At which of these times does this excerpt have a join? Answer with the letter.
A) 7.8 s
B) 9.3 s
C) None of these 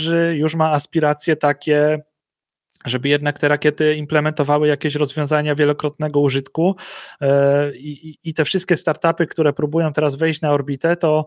C